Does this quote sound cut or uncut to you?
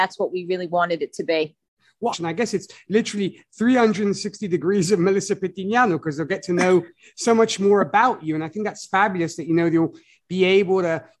cut